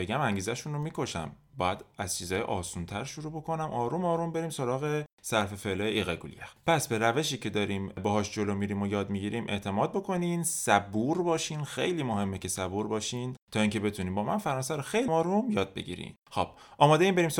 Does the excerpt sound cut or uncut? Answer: cut